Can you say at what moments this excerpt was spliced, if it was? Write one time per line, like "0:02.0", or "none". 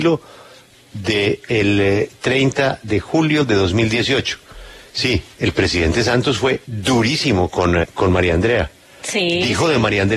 0:05.3
0:07.8